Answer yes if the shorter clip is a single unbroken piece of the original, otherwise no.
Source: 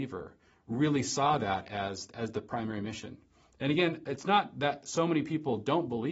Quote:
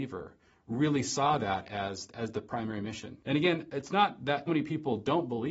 no